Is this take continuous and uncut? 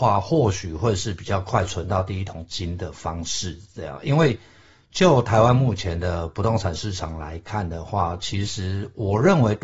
yes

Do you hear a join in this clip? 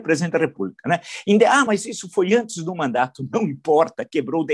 no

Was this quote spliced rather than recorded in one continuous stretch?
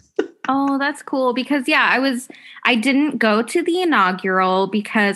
no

